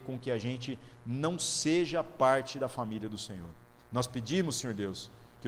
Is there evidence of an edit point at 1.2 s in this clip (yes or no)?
no